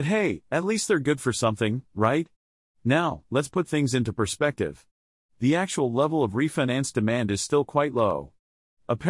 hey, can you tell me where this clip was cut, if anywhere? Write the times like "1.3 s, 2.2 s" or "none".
3.3 s